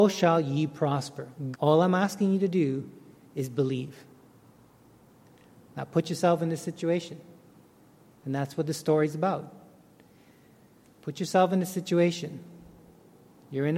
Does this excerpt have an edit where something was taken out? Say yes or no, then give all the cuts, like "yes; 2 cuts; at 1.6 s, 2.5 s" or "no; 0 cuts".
yes; 1 cut; at 1.5 s